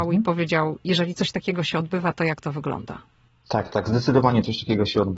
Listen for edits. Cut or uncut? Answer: uncut